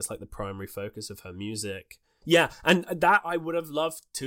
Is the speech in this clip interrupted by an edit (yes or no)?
yes